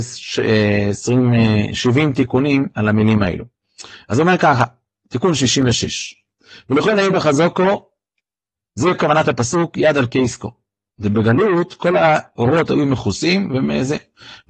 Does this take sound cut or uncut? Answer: uncut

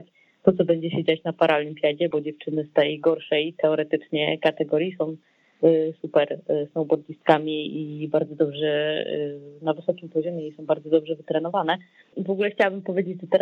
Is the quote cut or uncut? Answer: cut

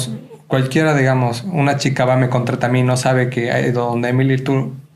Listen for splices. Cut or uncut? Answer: uncut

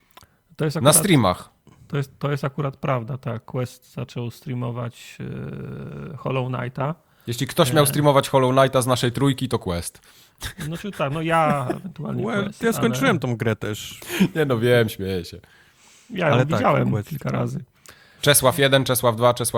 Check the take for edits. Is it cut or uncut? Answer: cut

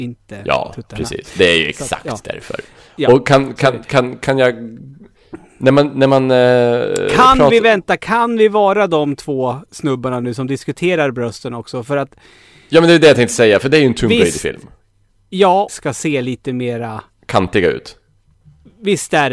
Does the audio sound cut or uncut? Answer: cut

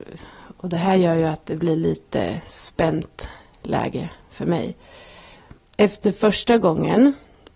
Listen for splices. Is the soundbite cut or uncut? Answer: uncut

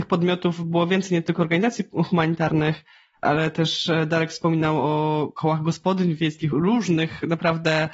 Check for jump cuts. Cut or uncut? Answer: cut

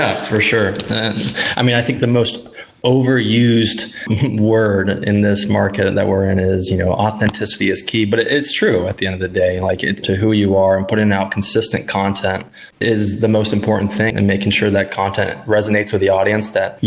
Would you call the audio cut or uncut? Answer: cut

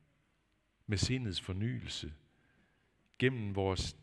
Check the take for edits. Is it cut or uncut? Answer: uncut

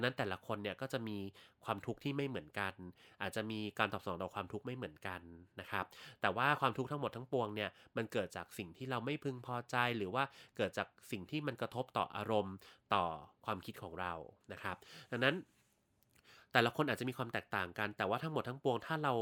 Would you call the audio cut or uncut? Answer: uncut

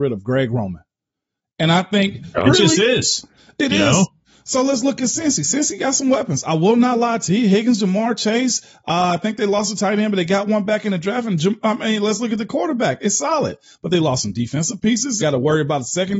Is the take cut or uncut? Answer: cut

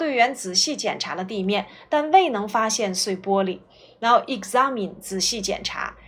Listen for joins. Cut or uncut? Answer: uncut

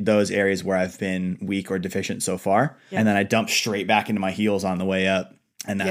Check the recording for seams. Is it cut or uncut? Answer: cut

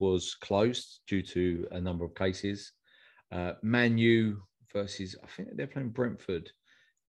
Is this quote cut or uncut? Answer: uncut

